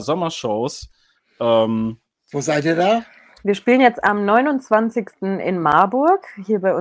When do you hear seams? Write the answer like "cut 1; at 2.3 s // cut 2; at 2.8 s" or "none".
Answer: none

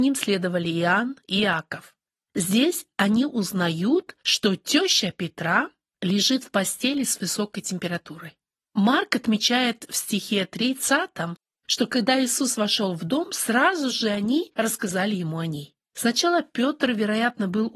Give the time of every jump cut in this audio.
cut 1; at 15.9 s

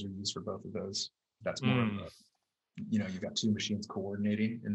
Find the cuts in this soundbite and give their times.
cut 1; at 1.4 s // cut 2; at 3.2 s

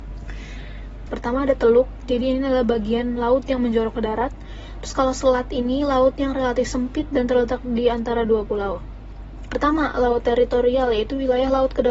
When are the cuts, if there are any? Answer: cut 1; at 1.1 s // cut 2; at 9.5 s

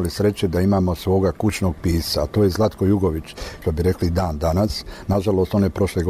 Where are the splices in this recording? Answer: cut 1; at 3.6 s

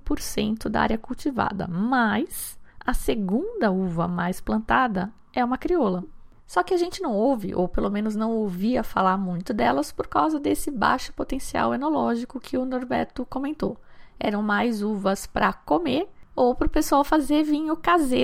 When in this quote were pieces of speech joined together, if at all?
cut 1; at 6.4 s

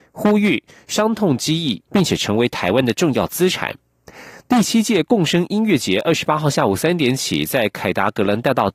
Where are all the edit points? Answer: cut 1; at 1.9 s

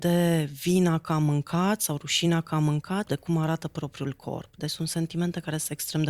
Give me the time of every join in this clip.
cut 1; at 3.0 s

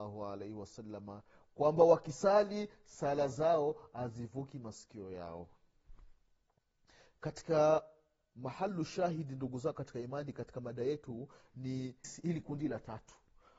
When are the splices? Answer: cut 1; at 12.0 s

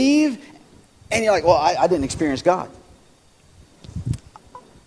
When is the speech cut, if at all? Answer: none

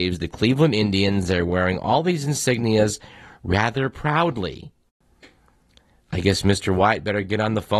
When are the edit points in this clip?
none

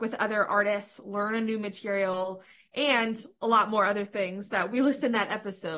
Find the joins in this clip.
none

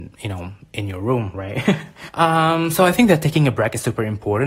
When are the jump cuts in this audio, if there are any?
cut 1; at 2.1 s

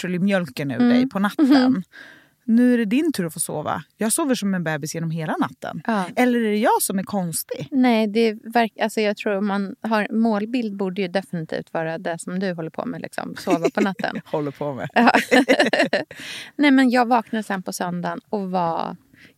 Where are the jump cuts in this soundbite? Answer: none

